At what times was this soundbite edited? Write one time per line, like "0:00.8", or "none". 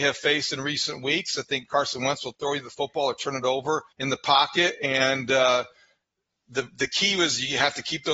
0:03.9